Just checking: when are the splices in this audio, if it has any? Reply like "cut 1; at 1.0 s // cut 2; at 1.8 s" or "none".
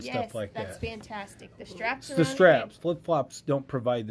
cut 1; at 2.8 s